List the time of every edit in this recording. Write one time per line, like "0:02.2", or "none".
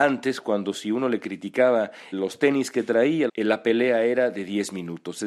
0:02.1
0:03.3